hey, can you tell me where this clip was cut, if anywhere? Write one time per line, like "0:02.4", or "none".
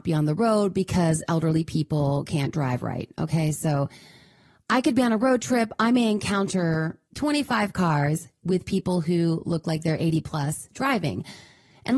none